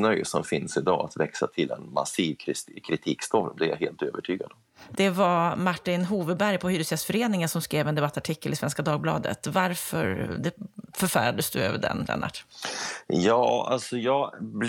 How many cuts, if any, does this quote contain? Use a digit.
1